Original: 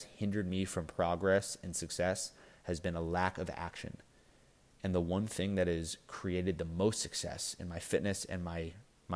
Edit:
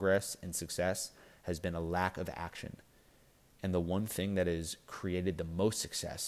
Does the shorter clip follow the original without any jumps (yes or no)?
yes